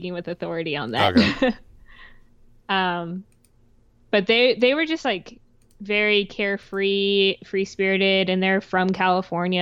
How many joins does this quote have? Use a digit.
0